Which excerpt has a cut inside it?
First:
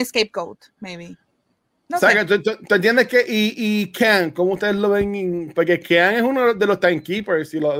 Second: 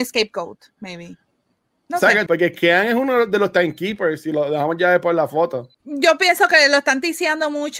second; 2 cuts; at 2.3 s, 5.7 s

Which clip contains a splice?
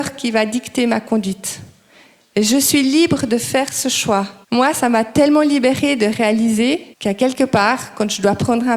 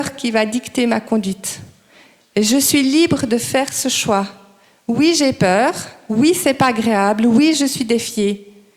first; 2 cuts; at 4.4 s, 6.9 s

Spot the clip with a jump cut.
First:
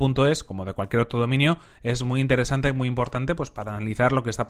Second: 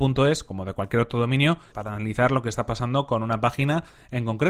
second; 1 cut; at 1.7 s

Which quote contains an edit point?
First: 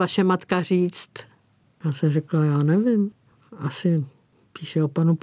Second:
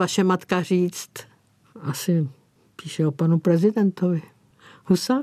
second; 1 cut; at 1.6 s

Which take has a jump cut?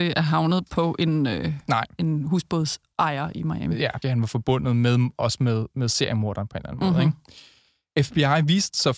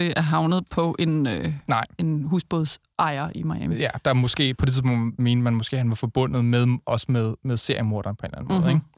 first; 1 cut; at 4.0 s

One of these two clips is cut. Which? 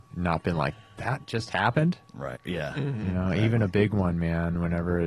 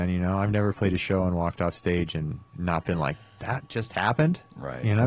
first; 1 cut; at 2.4 s

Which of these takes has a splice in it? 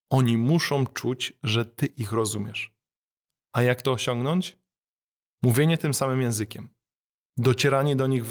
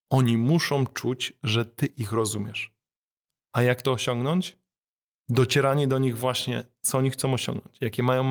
second; 1 cut; at 5.1 s

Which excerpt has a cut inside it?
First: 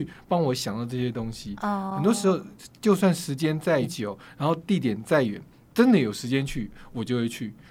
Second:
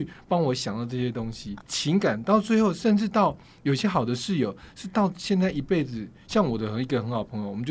second; 1 cut; at 1.6 s

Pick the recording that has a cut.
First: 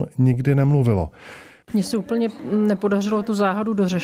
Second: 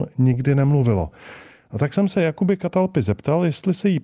first; 1 cut; at 1.6 s

